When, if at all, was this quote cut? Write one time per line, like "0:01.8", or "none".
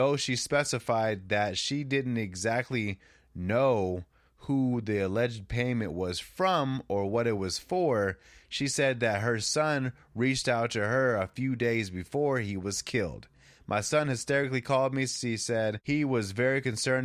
none